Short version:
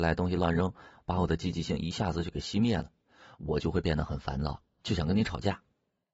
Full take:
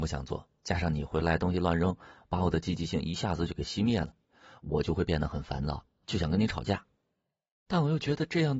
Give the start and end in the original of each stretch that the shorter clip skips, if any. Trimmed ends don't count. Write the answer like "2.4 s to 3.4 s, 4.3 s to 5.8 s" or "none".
none